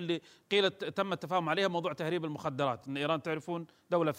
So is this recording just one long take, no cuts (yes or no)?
yes